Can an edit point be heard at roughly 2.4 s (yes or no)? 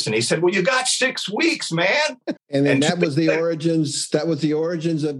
yes